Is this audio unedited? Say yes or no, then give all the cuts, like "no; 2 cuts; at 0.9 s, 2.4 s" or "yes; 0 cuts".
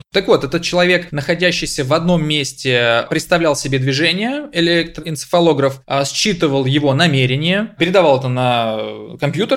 yes; 0 cuts